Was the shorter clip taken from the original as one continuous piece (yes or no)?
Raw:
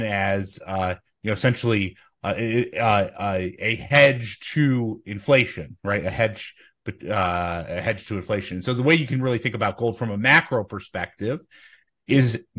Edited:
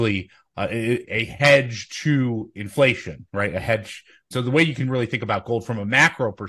no